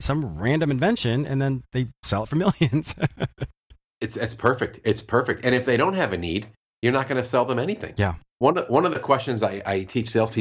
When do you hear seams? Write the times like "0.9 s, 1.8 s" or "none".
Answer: none

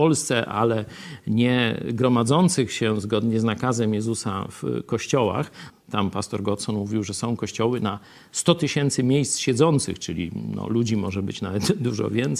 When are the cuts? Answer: 5.7 s

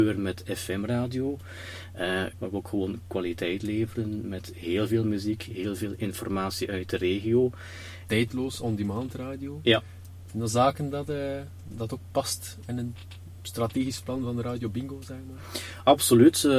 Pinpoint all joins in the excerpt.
2.3 s, 8.1 s

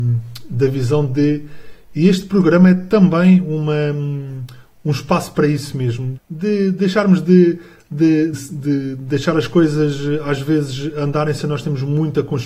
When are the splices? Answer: 6.1 s, 8.3 s

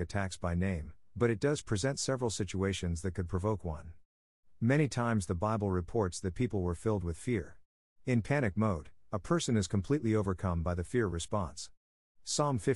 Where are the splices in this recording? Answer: 7.8 s

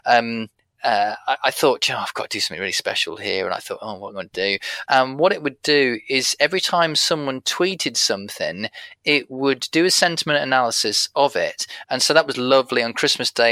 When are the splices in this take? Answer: 4.9 s, 11.8 s

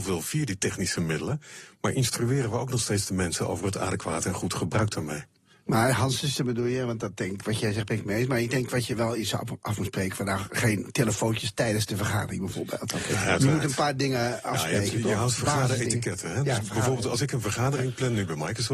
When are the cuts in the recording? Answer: none

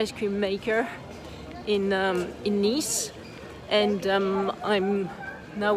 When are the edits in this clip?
none

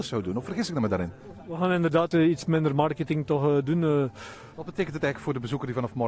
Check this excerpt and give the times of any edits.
2.1 s, 4.5 s

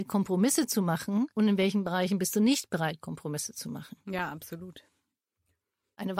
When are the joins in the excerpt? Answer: 1.3 s

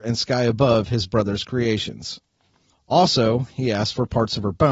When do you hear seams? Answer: 2.7 s

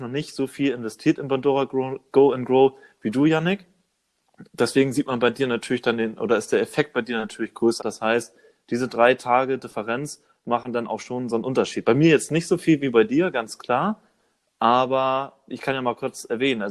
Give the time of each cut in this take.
7.8 s

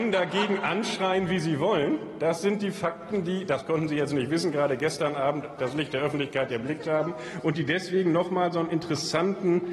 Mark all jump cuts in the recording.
none

